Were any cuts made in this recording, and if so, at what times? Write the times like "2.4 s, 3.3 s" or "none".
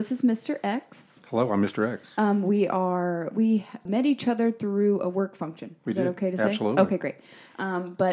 3.9 s